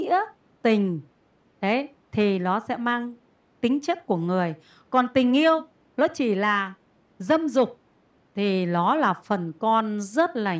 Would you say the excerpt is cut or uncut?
uncut